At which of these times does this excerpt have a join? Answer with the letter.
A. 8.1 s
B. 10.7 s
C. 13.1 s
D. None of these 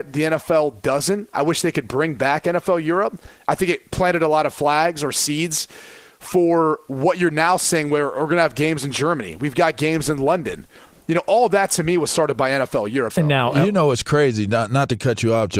C